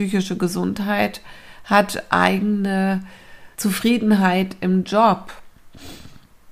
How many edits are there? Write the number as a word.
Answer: one